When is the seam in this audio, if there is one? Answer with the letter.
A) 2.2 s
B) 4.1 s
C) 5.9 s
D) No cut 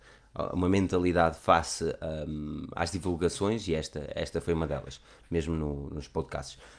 C